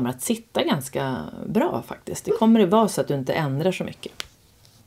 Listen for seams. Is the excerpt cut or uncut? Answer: uncut